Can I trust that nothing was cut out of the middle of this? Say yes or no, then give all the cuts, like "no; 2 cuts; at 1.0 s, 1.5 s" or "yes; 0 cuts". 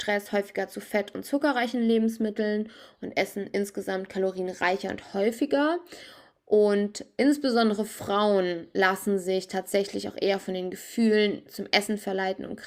yes; 0 cuts